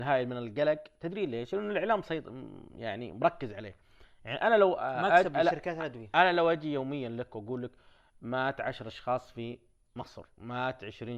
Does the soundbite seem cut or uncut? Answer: uncut